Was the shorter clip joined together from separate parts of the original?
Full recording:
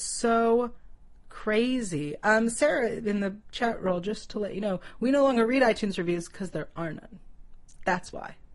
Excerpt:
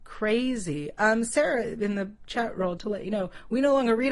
yes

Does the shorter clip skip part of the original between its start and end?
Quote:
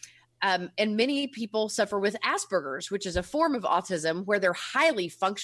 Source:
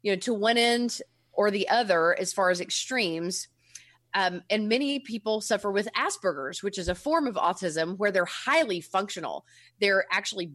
no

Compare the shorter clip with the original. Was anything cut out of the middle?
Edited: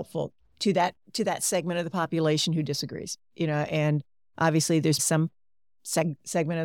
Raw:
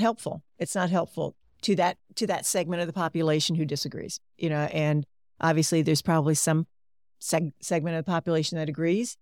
yes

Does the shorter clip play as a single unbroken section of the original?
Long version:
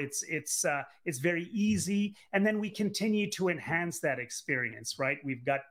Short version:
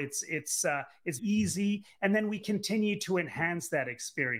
no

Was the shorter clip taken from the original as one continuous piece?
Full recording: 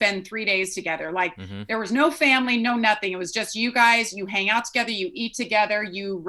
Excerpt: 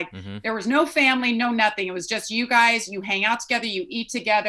yes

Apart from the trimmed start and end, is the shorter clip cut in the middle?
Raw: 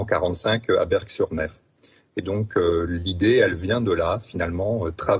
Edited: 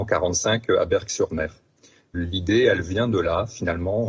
yes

